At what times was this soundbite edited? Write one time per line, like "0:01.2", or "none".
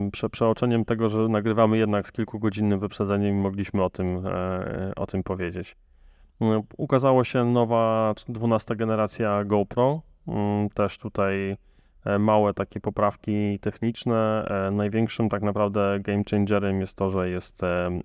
none